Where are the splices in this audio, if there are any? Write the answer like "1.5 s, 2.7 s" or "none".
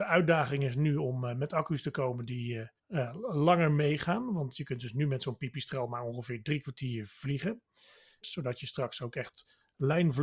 2.8 s, 8.2 s